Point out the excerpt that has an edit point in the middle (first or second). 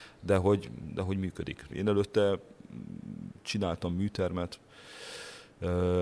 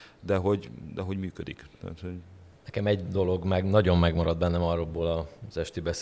first